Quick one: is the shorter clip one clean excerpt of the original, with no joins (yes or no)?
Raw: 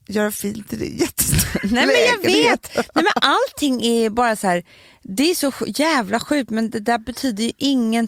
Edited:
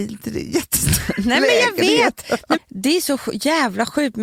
no